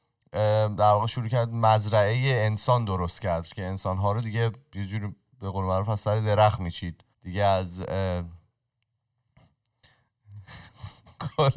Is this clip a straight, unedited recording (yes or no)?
no